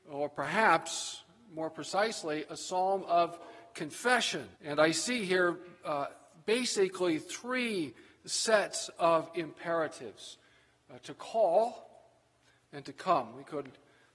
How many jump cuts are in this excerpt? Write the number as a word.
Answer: two